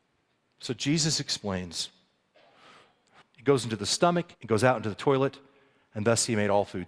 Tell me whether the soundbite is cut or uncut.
cut